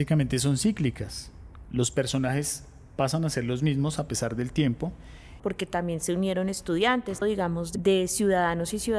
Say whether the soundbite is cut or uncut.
cut